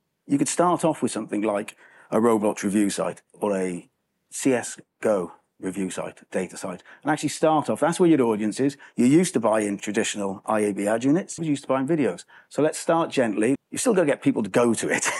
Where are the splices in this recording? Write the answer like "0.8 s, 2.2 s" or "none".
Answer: 11.4 s, 13.6 s

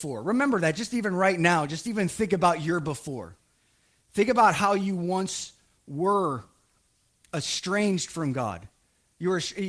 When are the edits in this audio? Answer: none

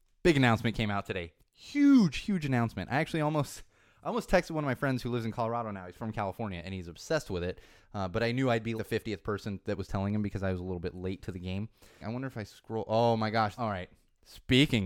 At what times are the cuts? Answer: 8.8 s, 12.0 s, 13.6 s

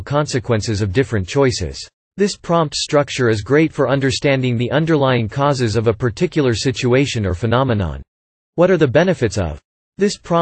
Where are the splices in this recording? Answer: 2.1 s, 8.4 s

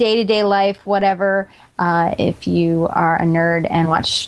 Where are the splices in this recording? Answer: 1.7 s

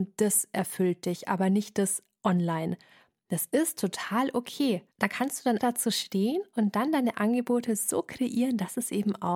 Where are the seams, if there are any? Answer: 5.6 s

